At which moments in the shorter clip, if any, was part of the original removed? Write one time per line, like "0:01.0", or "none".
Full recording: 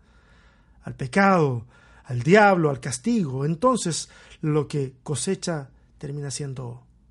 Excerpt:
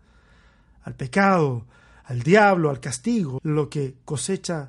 0:03.4